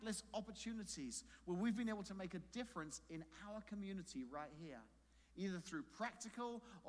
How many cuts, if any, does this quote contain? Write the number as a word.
zero